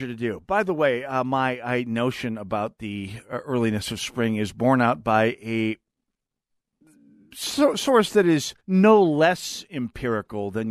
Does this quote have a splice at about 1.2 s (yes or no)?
no